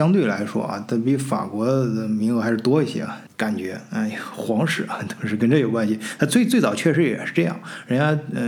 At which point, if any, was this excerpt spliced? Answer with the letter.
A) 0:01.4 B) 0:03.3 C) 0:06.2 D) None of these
B